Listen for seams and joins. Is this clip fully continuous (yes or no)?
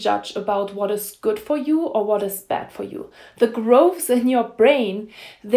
yes